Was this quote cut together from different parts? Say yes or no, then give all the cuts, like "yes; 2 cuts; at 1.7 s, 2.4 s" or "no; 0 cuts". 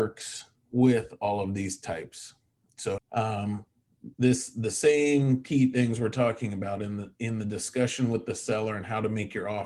yes; 2 cuts; at 3.0 s, 4.1 s